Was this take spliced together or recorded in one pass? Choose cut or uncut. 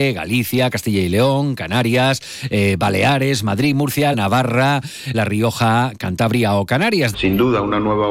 cut